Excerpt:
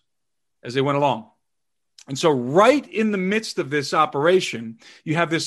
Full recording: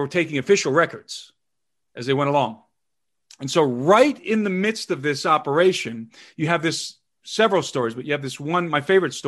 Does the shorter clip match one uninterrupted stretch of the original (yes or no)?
yes